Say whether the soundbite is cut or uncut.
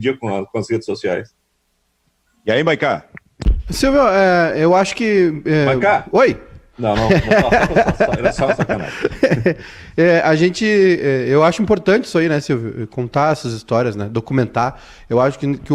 uncut